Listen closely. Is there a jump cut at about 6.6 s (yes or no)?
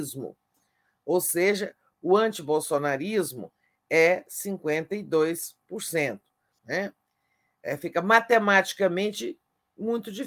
yes